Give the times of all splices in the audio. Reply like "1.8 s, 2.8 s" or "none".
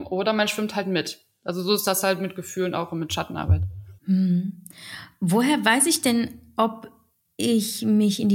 4.0 s